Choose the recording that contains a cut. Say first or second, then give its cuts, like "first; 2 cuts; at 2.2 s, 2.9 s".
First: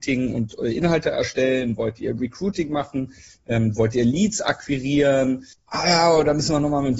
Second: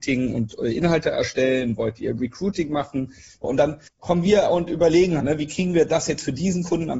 second; 2 cuts; at 3.4 s, 5.2 s